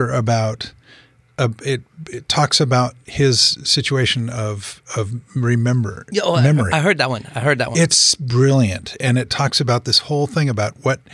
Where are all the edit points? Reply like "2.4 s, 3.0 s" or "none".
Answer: none

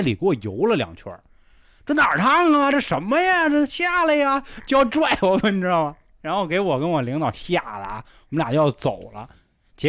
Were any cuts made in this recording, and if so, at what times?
none

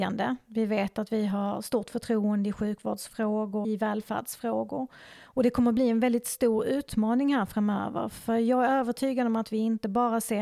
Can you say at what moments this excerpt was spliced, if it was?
3.6 s

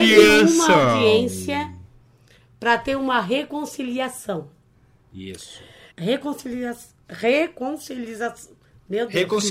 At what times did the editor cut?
5.9 s

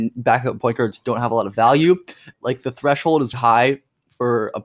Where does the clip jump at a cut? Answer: 2.3 s, 3.3 s

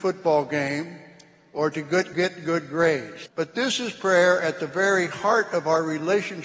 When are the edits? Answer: 2.1 s, 3.3 s

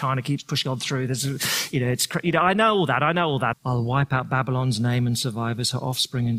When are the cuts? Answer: 3.5 s

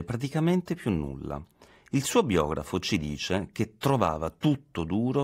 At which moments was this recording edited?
none

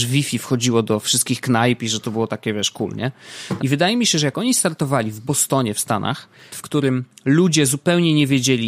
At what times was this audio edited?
3.6 s, 6.5 s

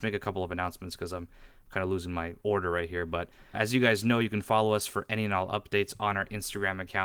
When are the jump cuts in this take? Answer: 3.5 s

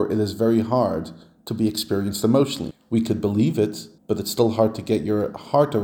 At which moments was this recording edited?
2.7 s, 4.0 s

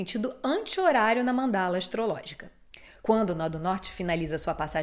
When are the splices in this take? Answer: 3.0 s

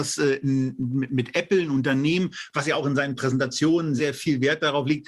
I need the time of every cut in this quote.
4.0 s

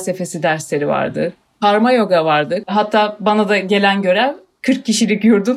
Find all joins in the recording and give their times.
2.6 s

